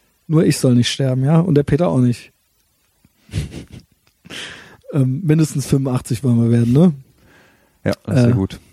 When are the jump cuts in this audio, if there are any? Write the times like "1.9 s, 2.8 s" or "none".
none